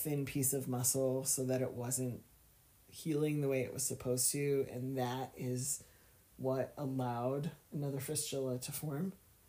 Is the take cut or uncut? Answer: uncut